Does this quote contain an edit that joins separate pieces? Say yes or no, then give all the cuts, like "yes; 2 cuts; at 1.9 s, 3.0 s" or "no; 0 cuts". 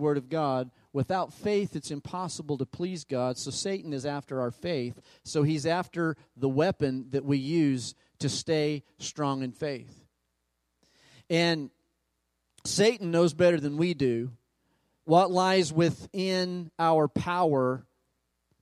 no; 0 cuts